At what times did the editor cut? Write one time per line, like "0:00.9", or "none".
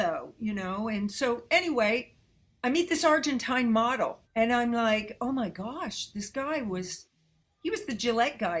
0:04.2